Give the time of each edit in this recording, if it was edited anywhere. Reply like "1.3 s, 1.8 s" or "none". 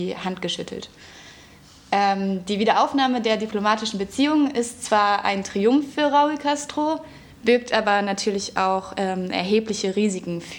none

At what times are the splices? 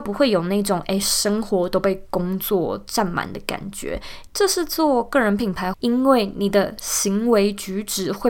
4.3 s, 5.7 s

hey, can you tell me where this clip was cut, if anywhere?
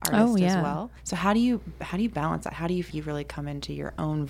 1.0 s, 2.9 s

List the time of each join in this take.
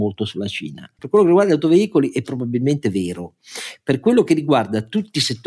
1.0 s

